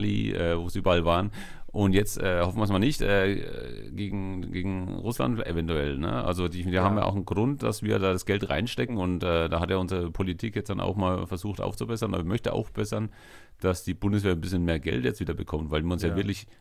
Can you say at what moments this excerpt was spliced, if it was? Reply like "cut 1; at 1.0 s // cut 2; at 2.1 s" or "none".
none